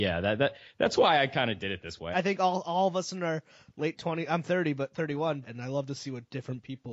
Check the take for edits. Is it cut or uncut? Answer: cut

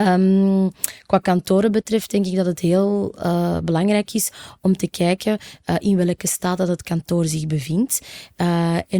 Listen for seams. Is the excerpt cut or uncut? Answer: uncut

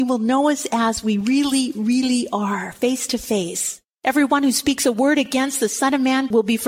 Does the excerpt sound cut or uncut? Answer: uncut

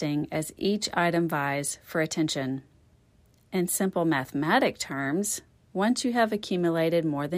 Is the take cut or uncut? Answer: uncut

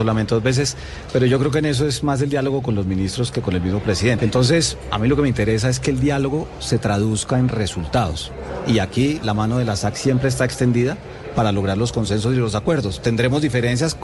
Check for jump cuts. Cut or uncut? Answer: cut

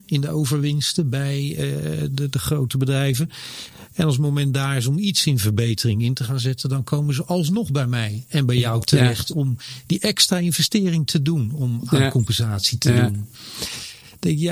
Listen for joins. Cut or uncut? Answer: uncut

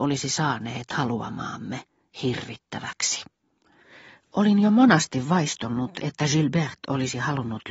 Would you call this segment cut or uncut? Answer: uncut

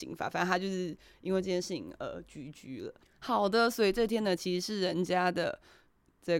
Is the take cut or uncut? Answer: uncut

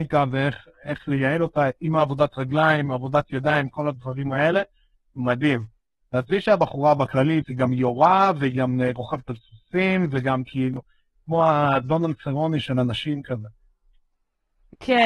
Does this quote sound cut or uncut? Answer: cut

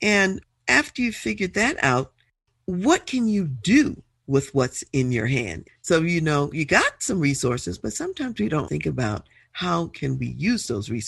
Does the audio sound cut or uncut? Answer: cut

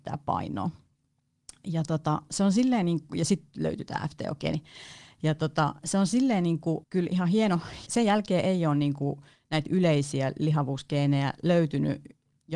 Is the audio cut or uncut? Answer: cut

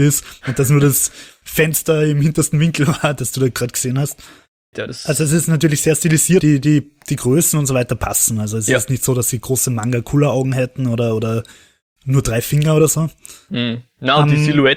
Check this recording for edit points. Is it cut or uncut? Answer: cut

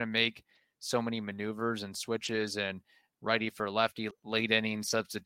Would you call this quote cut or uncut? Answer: cut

